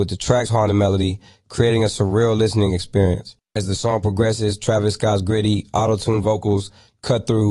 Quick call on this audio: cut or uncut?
uncut